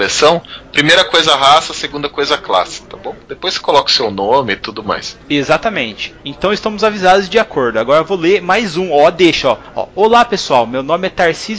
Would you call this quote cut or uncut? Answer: uncut